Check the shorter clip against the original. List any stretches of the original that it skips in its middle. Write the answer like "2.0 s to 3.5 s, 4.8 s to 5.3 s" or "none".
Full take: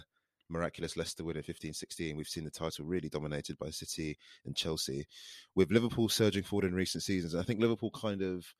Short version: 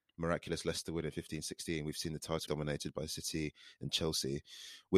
2.8 s to 3.1 s